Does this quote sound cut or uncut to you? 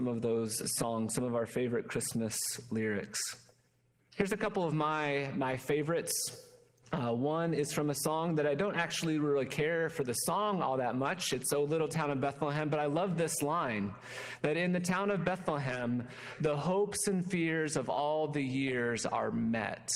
uncut